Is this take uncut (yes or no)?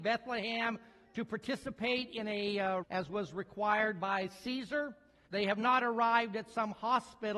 no